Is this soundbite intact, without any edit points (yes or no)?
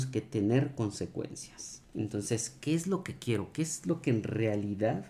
yes